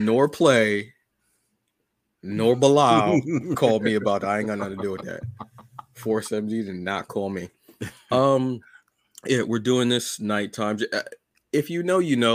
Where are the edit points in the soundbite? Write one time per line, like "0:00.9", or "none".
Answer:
none